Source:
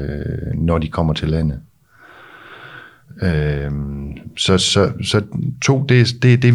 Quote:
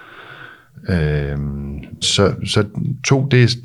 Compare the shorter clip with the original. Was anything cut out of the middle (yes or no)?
yes